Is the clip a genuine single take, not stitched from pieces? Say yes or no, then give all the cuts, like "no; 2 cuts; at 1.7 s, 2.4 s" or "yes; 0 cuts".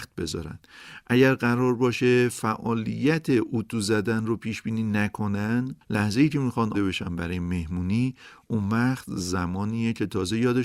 no; 1 cut; at 6.7 s